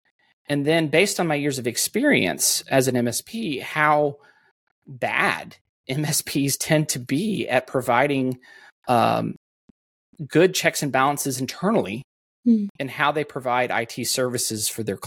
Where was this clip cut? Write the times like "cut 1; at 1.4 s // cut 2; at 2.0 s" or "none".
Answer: none